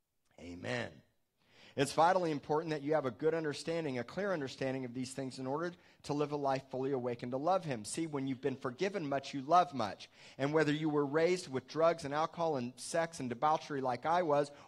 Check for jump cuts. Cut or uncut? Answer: uncut